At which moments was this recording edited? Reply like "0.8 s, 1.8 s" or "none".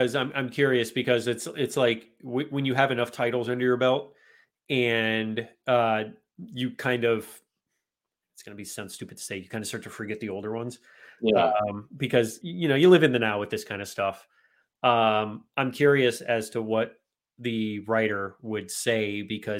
12.4 s